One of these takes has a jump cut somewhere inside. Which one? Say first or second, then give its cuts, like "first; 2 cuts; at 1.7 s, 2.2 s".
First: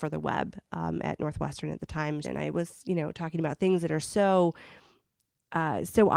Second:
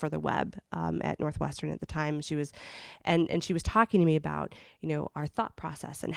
first; 1 cut; at 2.2 s